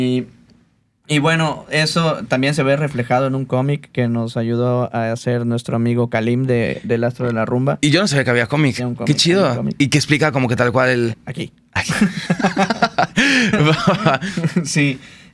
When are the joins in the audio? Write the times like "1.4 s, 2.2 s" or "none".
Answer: 8.8 s, 11.1 s

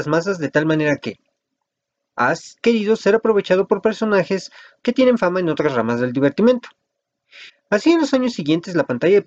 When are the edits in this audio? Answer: 4.8 s, 7.5 s

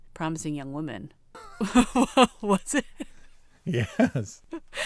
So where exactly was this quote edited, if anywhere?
1.3 s

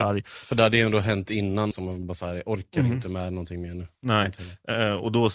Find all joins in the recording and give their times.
1.7 s

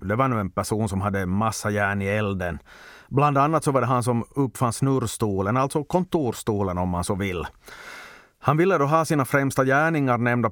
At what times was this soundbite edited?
none

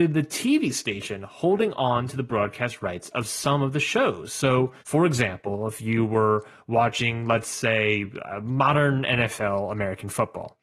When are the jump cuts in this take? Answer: 4.8 s

